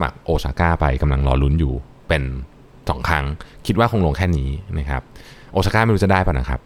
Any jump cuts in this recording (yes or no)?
no